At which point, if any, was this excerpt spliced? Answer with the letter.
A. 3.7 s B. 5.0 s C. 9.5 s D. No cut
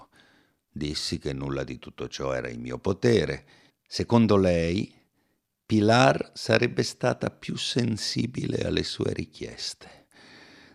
A